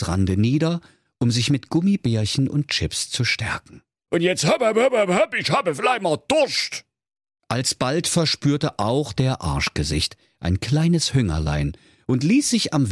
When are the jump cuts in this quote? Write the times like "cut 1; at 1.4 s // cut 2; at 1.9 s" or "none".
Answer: cut 1; at 4.1 s // cut 2; at 7.4 s